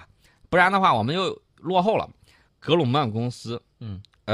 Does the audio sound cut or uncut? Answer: cut